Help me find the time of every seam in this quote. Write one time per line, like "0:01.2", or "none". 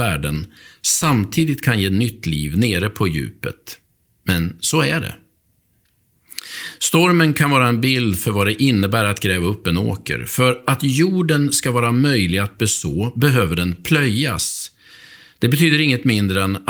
none